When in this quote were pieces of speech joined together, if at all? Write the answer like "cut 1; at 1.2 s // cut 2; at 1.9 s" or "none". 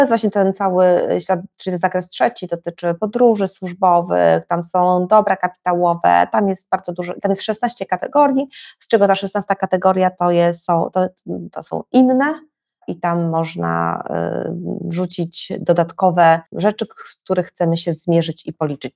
cut 1; at 16.5 s